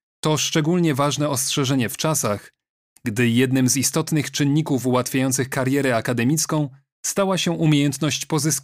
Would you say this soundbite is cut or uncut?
uncut